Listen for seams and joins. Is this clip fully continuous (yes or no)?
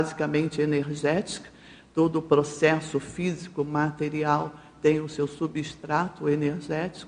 yes